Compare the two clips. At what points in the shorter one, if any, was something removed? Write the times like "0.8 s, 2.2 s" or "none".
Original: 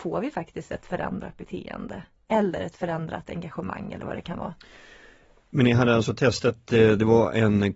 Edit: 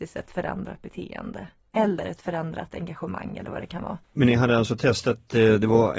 4.0 s